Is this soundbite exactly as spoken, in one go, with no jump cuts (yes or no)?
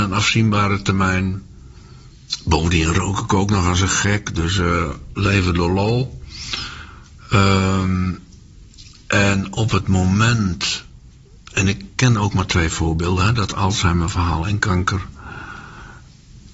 yes